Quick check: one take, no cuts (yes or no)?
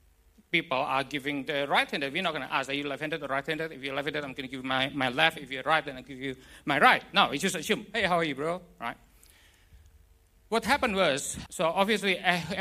no